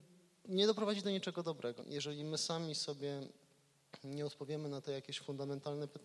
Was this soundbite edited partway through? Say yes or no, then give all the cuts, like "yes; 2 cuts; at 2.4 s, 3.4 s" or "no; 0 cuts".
yes; 1 cut; at 1.8 s